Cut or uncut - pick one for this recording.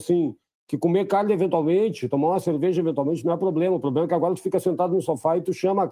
uncut